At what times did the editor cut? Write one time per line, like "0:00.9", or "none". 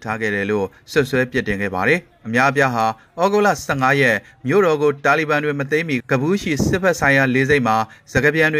0:06.0